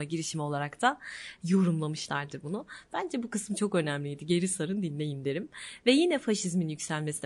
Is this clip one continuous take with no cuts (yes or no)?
yes